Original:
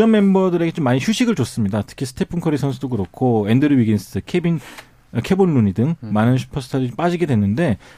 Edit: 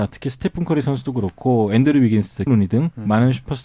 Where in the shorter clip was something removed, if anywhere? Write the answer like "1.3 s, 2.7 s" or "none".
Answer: 2.5 s